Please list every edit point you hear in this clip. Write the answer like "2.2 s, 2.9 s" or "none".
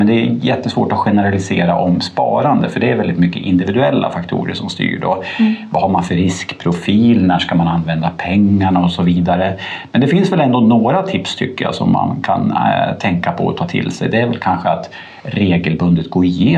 none